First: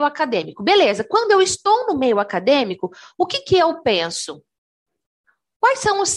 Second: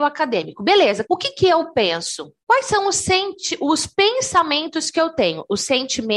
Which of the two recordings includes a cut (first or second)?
second